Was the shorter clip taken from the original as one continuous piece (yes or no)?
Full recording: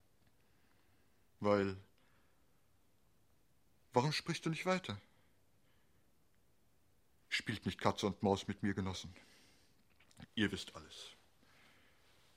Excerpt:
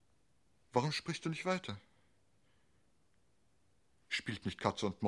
yes